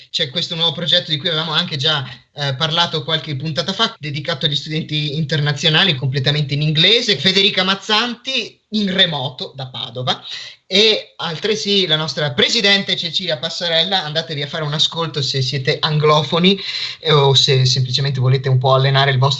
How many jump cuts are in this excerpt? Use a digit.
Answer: 3